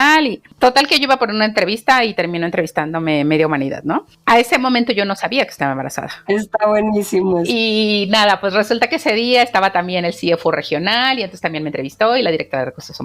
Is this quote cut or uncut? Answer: cut